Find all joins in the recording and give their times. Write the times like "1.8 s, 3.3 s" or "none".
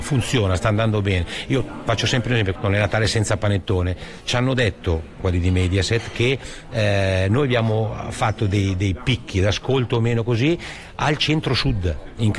2.5 s